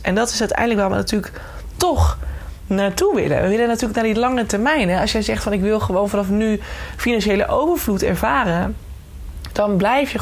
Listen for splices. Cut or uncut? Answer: uncut